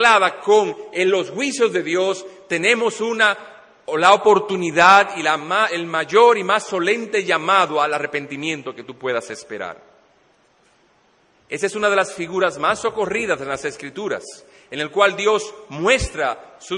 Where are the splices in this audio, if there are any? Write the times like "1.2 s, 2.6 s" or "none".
11.4 s